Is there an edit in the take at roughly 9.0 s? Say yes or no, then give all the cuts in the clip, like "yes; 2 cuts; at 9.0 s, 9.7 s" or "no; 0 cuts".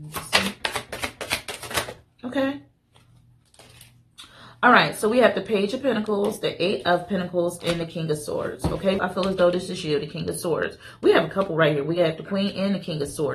yes; 1 cut; at 9.0 s